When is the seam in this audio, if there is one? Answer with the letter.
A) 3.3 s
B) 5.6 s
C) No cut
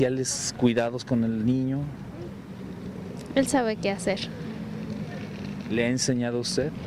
C